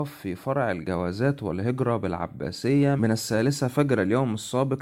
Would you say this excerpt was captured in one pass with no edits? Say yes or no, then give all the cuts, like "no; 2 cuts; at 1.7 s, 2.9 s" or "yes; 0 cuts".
no; 1 cut; at 3.0 s